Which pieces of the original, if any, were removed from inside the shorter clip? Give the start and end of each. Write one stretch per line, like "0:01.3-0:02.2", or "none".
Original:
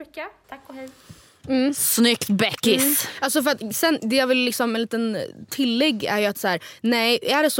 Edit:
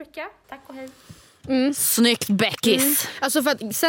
none